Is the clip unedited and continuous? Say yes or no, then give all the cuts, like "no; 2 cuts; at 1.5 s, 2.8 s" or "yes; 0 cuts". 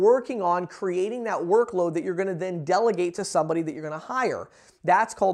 yes; 0 cuts